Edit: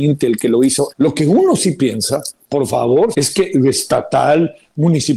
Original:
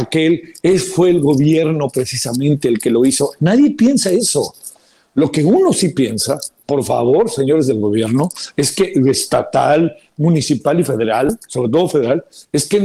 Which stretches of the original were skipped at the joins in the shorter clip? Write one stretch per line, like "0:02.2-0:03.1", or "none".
0:03.3-0:05.1
0:07.3-0:08.5